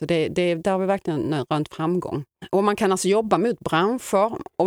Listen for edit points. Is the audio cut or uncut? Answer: uncut